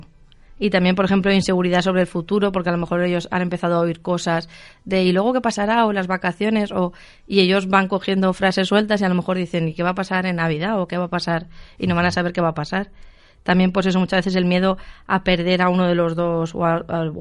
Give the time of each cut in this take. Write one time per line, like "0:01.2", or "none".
none